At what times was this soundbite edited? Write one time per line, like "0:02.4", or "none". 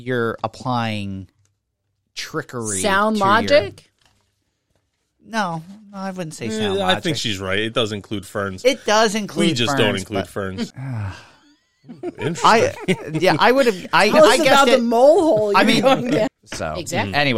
0:10.7
0:14.1
0:16.3